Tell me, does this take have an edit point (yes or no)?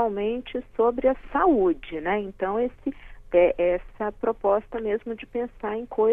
no